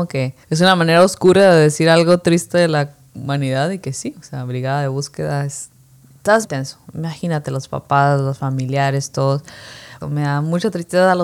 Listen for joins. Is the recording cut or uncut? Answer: cut